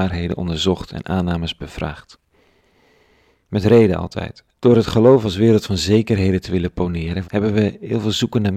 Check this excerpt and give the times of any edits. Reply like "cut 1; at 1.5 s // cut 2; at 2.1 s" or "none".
cut 1; at 4.5 s // cut 2; at 7.2 s